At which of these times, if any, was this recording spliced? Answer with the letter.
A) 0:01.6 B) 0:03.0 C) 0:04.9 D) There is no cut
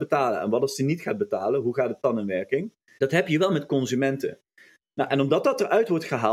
B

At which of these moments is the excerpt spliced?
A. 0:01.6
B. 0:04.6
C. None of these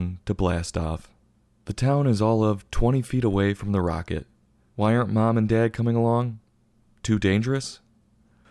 B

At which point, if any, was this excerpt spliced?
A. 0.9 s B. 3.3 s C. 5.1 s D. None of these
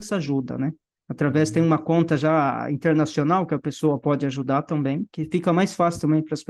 C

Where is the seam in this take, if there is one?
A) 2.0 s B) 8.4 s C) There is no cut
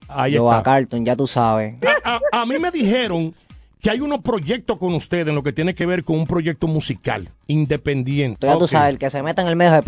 B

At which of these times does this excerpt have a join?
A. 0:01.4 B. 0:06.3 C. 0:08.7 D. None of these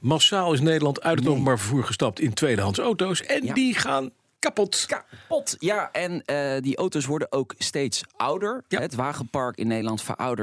D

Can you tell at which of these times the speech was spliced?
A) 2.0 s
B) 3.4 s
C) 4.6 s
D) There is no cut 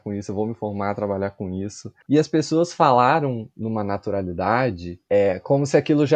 A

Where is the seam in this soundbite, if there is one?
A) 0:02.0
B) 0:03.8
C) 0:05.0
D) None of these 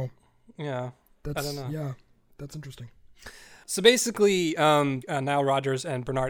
C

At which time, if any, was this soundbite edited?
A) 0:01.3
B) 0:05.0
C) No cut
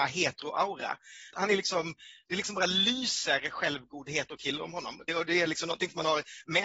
A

